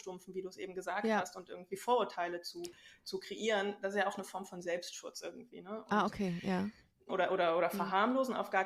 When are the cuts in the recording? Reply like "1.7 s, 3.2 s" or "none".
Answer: 7.1 s